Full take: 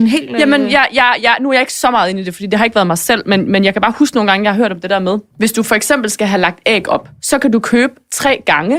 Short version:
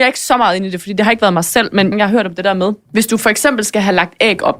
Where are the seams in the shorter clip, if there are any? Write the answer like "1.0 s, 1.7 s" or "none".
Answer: 1.9 s